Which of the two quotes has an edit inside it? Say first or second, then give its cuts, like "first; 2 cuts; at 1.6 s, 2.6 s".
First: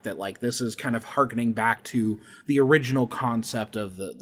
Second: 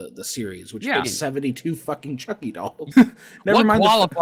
second; 2 cuts; at 1.0 s, 2.9 s